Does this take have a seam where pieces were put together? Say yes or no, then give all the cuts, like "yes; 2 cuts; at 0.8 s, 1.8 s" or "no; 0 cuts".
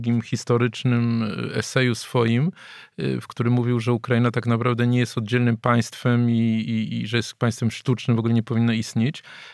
no; 0 cuts